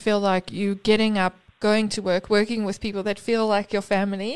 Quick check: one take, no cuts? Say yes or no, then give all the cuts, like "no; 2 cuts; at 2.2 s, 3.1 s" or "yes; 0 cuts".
yes; 0 cuts